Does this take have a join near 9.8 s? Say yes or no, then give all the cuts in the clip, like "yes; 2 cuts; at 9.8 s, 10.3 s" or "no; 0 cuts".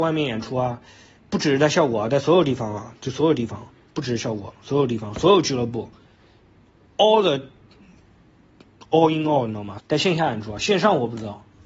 yes; 1 cut; at 9.8 s